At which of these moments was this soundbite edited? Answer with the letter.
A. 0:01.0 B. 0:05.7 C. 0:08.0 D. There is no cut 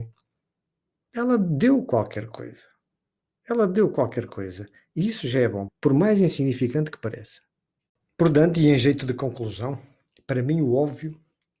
B